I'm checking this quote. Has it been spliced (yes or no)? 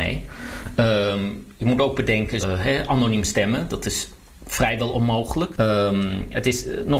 yes